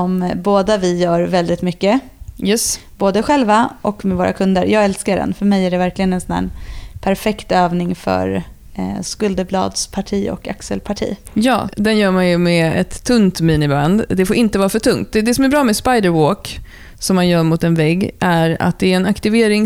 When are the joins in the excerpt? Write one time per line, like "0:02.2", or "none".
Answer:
0:09.0